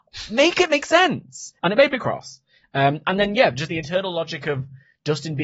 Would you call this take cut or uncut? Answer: cut